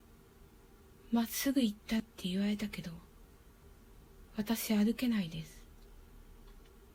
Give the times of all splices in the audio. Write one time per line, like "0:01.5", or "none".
0:02.0
0:04.3